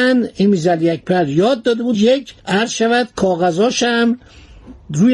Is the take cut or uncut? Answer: cut